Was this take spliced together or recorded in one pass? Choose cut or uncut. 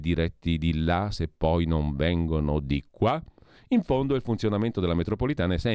uncut